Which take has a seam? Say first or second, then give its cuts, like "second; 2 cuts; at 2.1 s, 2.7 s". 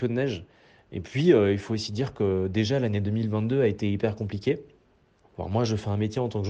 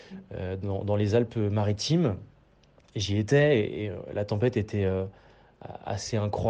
first; 1 cut; at 5.2 s